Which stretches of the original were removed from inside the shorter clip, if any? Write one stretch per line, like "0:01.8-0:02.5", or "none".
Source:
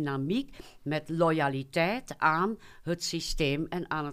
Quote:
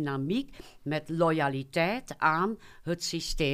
none